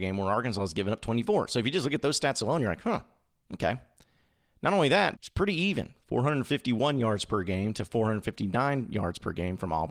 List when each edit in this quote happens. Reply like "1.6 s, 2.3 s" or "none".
5.1 s